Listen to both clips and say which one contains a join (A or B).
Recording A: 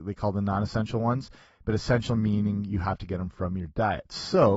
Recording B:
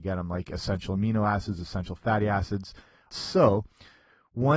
B